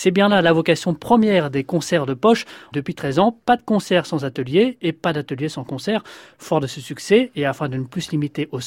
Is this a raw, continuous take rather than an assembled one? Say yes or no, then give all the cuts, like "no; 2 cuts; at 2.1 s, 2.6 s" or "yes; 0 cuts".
no; 2 cuts; at 2.7 s, 6.3 s